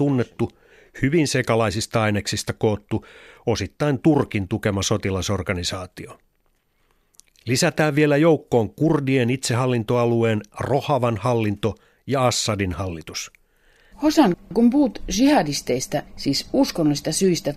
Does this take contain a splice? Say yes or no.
yes